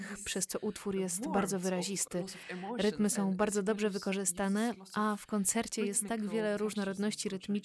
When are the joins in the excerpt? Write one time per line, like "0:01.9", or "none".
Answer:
none